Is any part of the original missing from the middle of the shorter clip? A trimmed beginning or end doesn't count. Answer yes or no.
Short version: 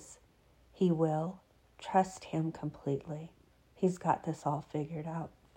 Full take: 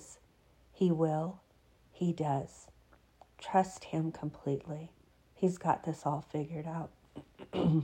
yes